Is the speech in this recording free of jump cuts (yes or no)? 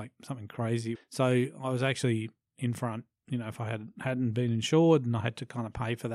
no